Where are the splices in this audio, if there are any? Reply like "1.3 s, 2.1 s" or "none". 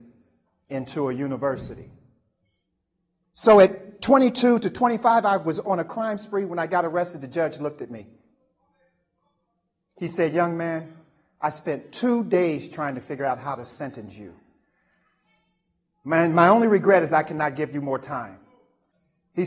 none